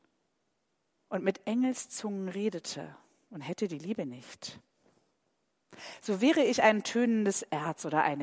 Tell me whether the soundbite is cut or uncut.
uncut